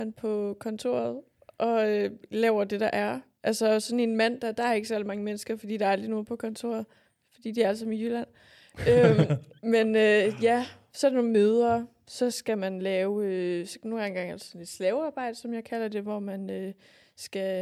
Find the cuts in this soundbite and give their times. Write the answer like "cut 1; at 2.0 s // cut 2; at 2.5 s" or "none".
none